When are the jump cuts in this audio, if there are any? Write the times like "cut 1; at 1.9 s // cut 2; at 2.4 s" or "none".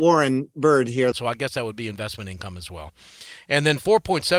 cut 1; at 1.1 s